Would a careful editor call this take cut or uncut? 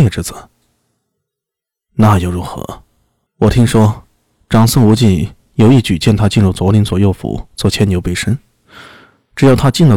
cut